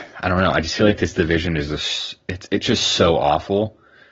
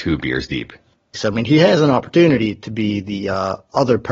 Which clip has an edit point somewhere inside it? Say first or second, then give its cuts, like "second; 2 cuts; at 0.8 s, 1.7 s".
second; 1 cut; at 1.1 s